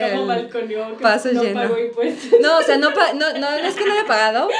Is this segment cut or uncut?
uncut